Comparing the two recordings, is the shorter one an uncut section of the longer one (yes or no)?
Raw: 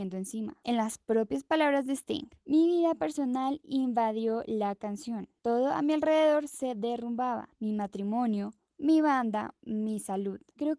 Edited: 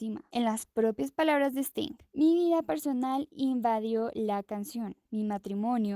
no